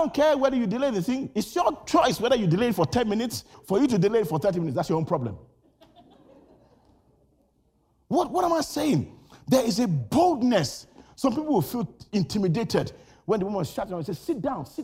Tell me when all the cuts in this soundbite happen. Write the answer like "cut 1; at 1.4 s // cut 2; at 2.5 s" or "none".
cut 1; at 3.5 s